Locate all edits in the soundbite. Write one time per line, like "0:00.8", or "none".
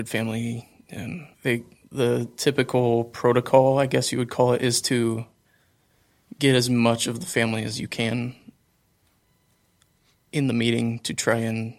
0:01.3